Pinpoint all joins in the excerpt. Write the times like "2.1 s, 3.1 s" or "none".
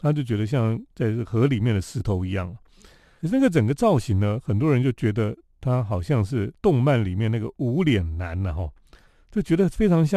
none